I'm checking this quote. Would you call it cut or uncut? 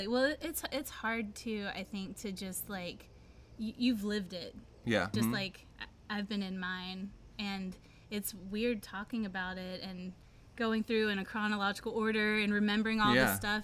cut